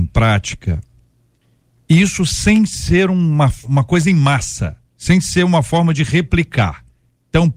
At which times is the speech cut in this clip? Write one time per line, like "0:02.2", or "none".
0:03.6
0:04.9